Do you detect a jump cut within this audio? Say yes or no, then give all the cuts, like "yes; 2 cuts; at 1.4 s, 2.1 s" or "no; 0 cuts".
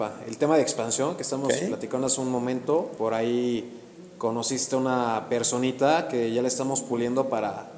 yes; 1 cut; at 3.0 s